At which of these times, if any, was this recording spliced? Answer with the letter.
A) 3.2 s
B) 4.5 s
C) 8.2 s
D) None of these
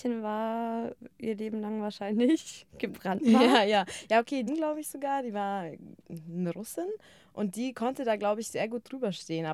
B